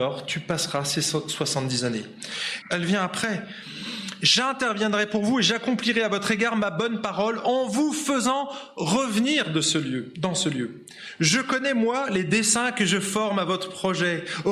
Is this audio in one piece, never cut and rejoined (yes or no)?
no